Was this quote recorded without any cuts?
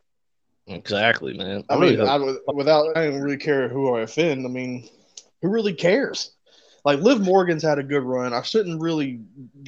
no; 1 cut; at 2.9 s

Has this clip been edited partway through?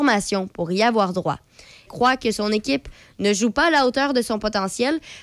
yes; 1 cut; at 1.9 s

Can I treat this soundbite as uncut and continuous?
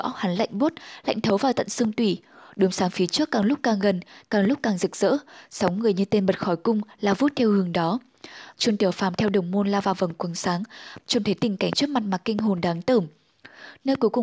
no; 2 cuts; at 8.5 s, 11.0 s

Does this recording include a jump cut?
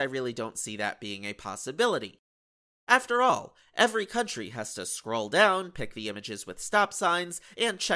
no; 0 cuts

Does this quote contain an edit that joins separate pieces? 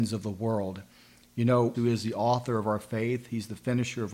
yes; 1 cut; at 1.7 s

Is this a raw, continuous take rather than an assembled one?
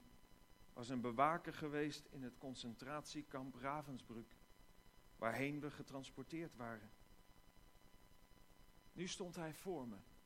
yes; 0 cuts

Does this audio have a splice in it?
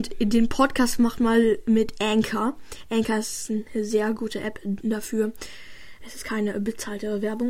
no; 0 cuts

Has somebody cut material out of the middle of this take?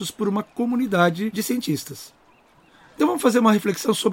yes; 1 cut; at 3.0 s

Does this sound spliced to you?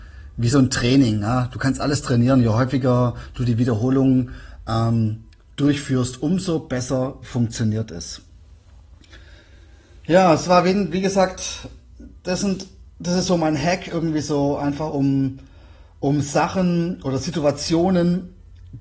no; 0 cuts

